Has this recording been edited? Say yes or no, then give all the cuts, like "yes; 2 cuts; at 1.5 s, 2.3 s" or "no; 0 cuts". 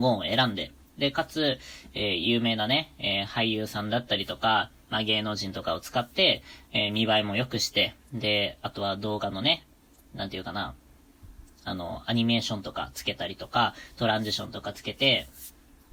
no; 0 cuts